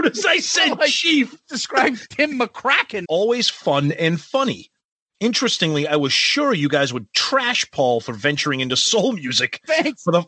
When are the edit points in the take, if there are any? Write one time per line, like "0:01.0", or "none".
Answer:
0:03.0